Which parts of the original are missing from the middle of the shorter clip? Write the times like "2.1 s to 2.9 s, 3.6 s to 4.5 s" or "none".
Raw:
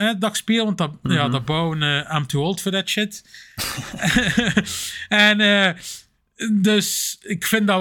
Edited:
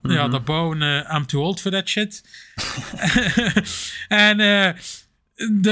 none